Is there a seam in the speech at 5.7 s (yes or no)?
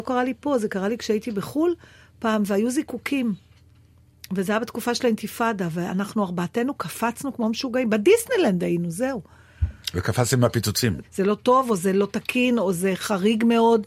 no